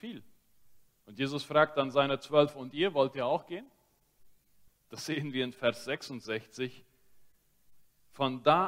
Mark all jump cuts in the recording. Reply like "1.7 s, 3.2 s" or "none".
4.7 s